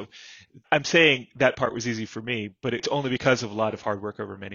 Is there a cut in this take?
no; 0 cuts

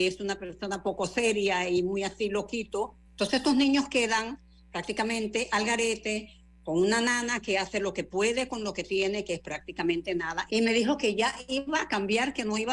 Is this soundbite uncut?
no; 2 cuts; at 3.0 s, 10.5 s

